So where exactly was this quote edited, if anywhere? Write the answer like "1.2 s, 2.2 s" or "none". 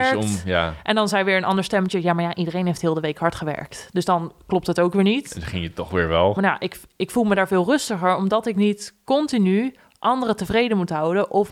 6.4 s

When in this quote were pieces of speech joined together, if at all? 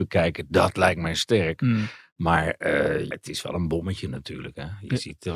3.1 s

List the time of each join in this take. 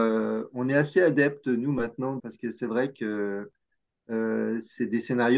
2.2 s

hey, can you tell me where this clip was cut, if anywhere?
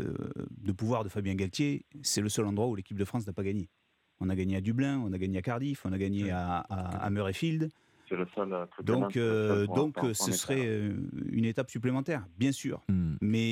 8.1 s

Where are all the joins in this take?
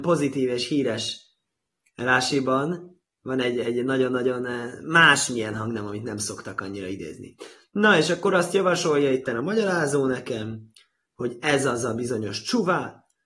none

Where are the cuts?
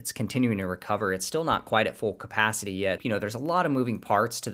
3.0 s

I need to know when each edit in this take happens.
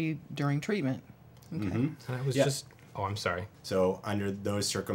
1.5 s, 3.5 s

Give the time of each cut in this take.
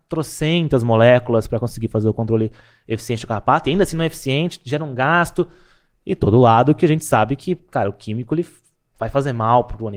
none

